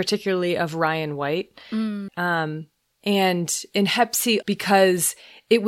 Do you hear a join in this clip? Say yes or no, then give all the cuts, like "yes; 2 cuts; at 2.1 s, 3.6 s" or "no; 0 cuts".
yes; 2 cuts; at 2.1 s, 4.4 s